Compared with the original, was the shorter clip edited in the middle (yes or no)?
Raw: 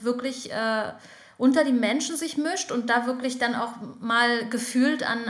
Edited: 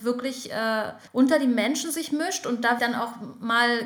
yes